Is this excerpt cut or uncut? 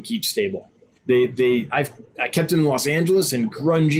cut